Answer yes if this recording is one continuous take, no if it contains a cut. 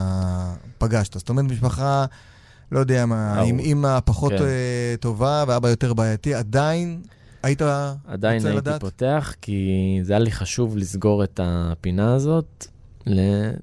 yes